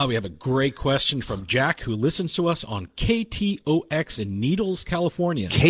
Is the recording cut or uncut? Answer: uncut